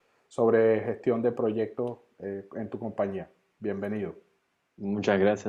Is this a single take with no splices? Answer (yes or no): yes